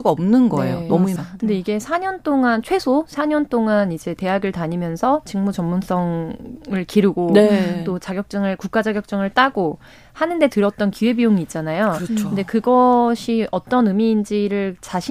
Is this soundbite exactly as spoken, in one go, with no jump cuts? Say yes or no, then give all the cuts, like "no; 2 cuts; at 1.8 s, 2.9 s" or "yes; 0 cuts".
no; 1 cut; at 1.2 s